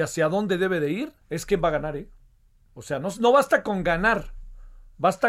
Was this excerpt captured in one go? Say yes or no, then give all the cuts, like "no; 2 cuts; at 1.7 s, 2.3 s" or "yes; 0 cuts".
no; 1 cut; at 1.2 s